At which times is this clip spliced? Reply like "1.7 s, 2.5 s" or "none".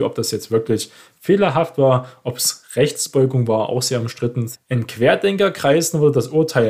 4.5 s